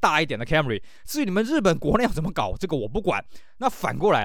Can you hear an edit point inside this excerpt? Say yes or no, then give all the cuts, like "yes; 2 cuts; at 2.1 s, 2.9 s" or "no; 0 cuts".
no; 0 cuts